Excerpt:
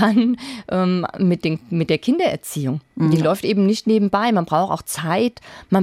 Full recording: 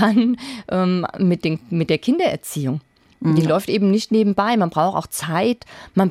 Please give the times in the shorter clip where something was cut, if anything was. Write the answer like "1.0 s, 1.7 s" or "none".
2.9 s